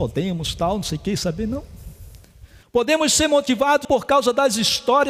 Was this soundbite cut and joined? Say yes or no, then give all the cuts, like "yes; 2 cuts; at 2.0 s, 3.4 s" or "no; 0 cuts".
yes; 2 cuts; at 2.6 s, 3.8 s